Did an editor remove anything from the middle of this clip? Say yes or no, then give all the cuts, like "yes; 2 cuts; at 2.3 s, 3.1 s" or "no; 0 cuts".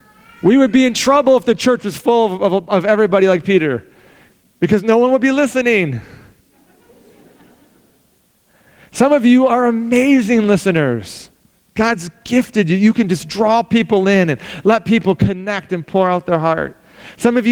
no; 0 cuts